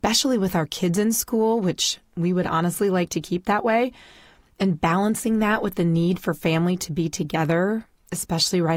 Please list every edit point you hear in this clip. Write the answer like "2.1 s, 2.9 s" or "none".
none